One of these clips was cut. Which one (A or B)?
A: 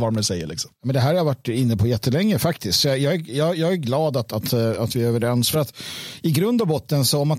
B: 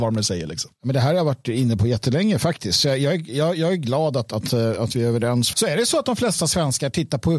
B